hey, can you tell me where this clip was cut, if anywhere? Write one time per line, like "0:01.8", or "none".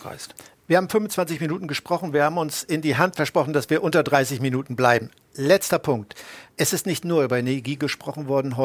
0:06.5